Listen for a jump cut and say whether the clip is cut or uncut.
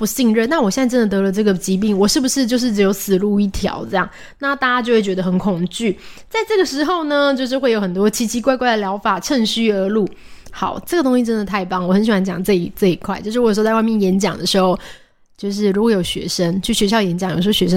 uncut